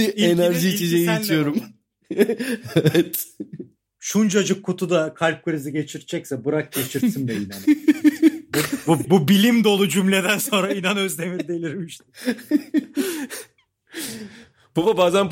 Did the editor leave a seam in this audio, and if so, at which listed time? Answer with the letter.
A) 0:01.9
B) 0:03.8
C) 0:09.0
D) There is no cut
C